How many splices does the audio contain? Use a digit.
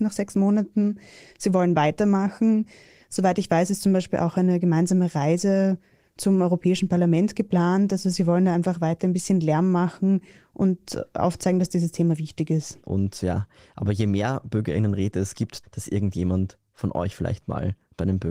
2